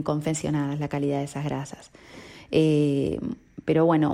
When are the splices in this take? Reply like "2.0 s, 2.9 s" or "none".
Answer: none